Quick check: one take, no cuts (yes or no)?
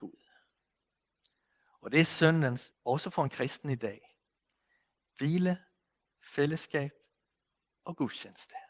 no